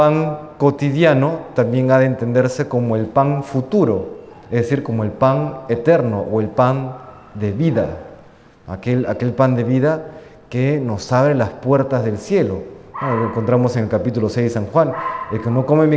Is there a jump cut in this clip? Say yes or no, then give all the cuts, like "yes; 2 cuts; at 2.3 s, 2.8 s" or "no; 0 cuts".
no; 0 cuts